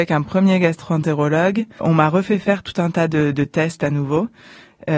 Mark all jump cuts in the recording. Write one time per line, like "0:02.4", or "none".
none